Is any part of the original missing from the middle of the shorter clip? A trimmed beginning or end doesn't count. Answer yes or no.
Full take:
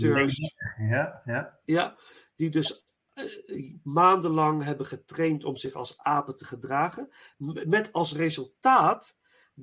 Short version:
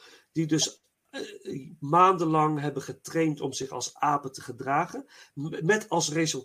no